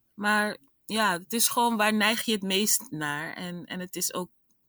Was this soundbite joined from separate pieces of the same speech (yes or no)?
no